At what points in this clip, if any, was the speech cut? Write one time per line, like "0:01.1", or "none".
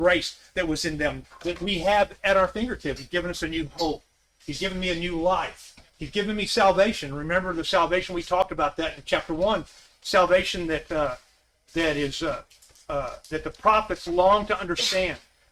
0:01.2
0:03.0